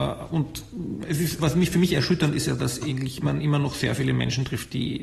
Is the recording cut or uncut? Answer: cut